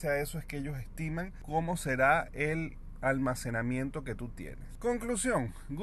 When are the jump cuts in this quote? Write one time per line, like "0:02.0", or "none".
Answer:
none